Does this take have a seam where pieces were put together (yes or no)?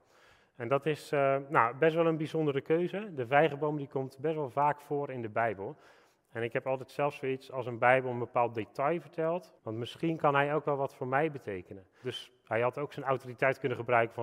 yes